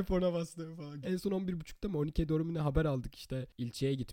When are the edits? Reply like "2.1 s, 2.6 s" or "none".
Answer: 1.0 s

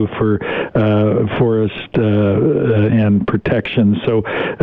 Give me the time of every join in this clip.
2.9 s

